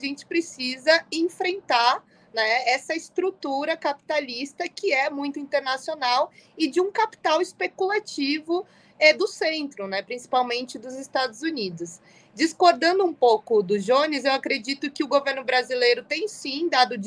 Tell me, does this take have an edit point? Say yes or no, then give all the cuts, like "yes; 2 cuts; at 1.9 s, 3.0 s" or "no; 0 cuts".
no; 0 cuts